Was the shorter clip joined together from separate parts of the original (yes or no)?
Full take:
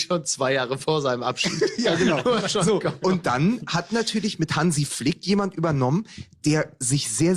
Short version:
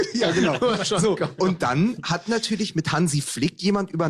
no